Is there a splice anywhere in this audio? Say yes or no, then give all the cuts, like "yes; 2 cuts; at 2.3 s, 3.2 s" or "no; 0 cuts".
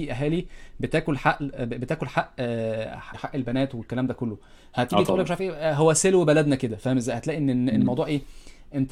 yes; 1 cut; at 3.1 s